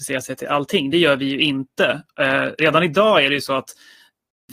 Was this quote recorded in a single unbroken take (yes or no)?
yes